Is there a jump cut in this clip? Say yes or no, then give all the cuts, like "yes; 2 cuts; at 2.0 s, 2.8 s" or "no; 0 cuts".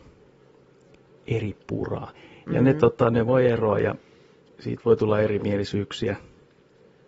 yes; 1 cut; at 2.5 s